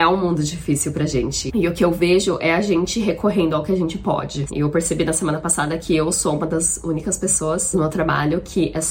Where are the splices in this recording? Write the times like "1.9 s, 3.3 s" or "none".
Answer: 4.5 s